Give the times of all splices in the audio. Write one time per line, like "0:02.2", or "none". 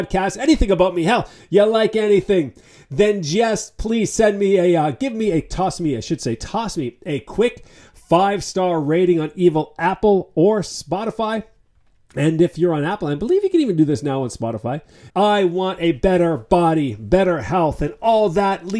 0:15.1